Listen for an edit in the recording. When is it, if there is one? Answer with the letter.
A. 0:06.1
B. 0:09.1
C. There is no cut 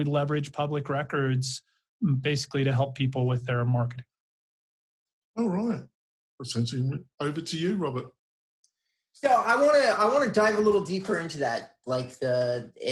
C